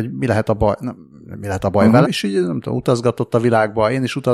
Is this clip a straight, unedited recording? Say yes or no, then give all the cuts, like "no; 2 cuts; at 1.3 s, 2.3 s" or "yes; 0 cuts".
no; 1 cut; at 2.0 s